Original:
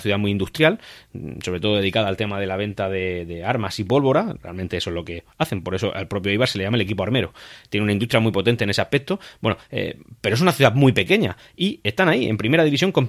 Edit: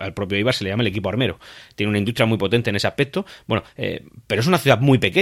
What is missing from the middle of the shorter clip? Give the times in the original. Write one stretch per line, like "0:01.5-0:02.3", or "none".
none